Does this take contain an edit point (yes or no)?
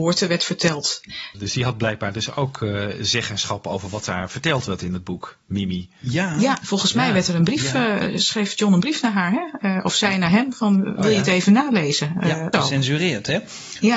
yes